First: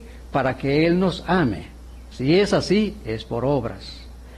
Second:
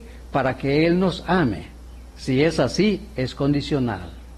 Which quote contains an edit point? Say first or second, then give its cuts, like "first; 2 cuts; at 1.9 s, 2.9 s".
first; 1 cut; at 2.1 s